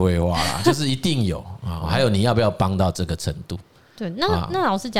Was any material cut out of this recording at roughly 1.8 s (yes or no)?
yes